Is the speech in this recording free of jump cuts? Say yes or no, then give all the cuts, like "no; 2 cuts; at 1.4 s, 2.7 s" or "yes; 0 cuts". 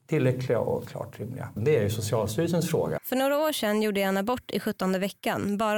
no; 2 cuts; at 1.6 s, 3.0 s